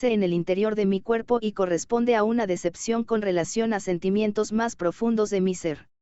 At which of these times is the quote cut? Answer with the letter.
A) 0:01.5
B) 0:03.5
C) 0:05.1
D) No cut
D